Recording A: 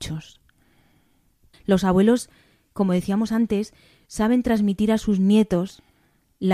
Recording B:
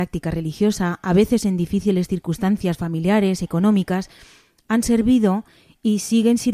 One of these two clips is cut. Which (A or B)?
A